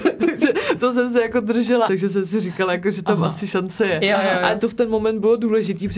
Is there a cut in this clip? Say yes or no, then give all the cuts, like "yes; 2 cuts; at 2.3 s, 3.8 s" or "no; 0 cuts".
yes; 1 cut; at 1.9 s